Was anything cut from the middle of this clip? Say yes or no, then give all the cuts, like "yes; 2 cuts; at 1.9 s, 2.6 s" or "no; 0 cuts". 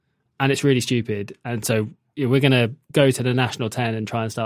no; 0 cuts